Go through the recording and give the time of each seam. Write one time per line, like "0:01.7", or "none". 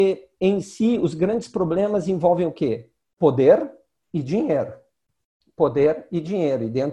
none